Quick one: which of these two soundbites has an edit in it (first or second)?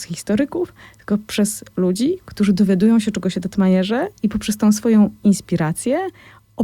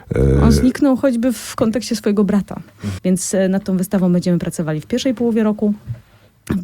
second